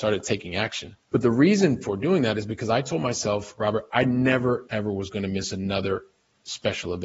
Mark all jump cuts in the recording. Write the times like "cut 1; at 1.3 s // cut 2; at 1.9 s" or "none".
cut 1; at 1.0 s // cut 2; at 4.7 s